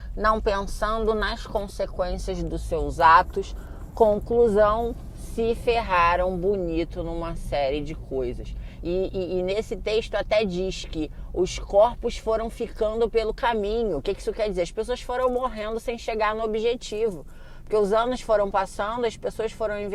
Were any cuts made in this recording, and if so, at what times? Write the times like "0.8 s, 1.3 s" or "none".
none